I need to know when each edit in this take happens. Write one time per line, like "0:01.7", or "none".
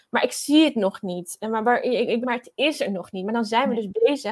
0:02.2